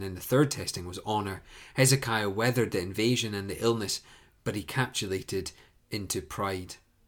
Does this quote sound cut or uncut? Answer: uncut